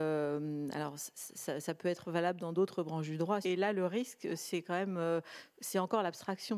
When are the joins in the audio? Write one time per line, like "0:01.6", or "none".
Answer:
0:03.4